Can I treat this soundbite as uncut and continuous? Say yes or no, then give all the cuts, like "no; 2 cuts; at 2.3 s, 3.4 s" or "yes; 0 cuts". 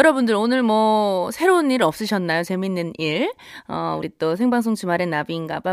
yes; 0 cuts